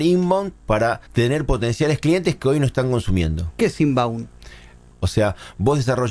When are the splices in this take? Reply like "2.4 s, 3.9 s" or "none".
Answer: 1.1 s, 4.9 s